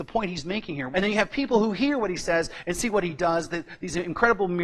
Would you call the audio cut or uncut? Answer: cut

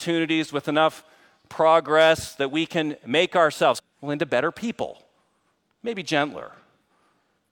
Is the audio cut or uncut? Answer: cut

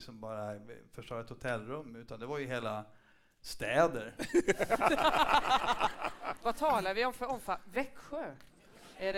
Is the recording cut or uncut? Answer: uncut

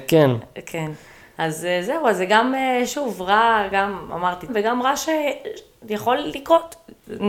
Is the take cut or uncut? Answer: cut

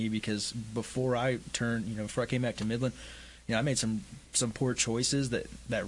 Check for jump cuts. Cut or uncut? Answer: uncut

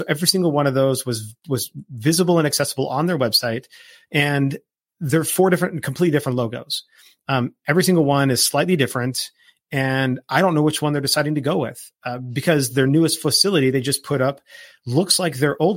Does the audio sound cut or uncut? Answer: uncut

